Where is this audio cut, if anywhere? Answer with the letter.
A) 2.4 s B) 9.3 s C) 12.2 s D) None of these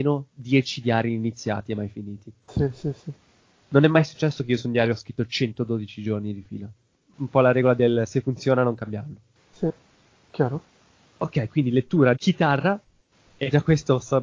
C